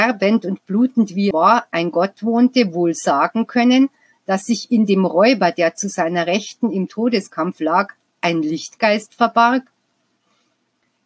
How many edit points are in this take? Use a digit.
1